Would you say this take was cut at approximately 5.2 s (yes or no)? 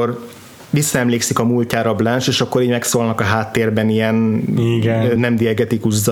no